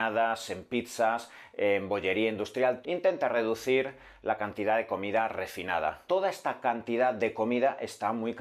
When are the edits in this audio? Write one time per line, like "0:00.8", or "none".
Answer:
0:02.8
0:06.1